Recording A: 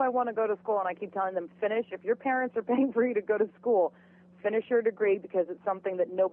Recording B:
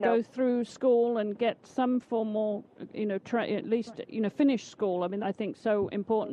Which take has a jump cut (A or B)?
B